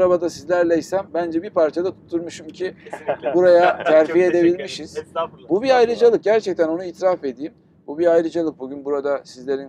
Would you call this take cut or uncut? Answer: uncut